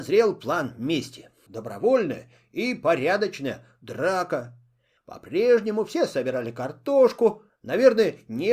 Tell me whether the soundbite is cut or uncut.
cut